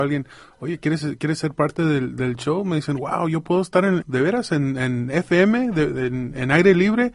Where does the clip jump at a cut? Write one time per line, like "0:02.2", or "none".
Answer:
0:04.0